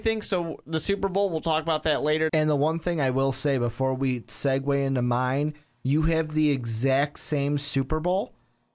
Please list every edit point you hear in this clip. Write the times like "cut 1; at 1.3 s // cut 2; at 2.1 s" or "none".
cut 1; at 2.3 s